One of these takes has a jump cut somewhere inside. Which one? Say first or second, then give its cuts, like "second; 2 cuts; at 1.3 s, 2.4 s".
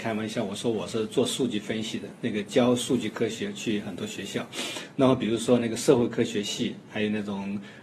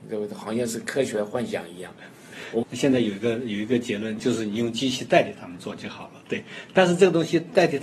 second; 2 cuts; at 2.6 s, 4.2 s